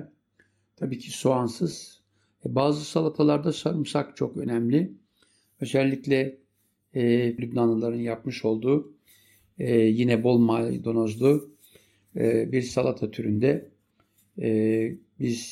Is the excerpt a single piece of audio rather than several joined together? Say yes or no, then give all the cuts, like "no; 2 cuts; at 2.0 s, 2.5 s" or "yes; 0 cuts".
no; 1 cut; at 7.4 s